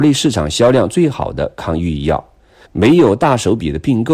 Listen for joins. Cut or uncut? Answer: cut